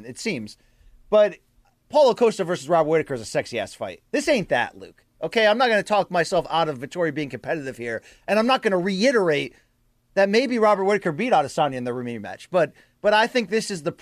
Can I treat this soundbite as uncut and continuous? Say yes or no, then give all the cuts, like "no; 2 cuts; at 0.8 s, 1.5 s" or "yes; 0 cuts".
yes; 0 cuts